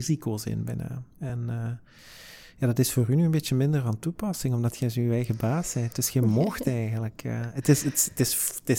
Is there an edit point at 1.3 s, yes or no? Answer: no